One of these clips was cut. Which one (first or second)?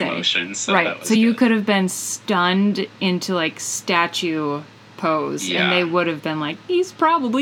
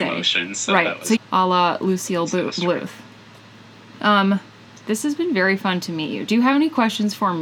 second